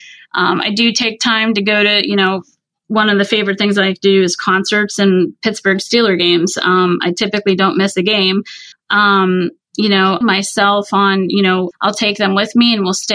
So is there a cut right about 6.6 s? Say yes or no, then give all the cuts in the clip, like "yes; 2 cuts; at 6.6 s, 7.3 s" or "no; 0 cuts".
no; 3 cuts; at 8.7 s, 10.2 s, 11.7 s